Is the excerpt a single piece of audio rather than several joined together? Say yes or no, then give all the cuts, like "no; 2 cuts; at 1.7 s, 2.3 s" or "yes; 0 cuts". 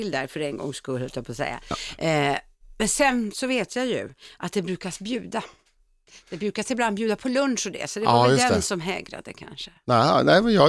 yes; 0 cuts